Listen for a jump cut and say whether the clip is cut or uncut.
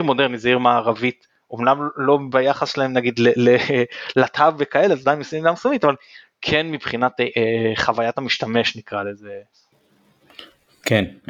uncut